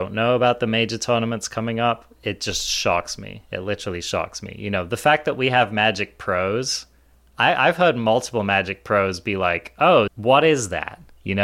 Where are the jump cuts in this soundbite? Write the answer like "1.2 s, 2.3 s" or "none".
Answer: 10.1 s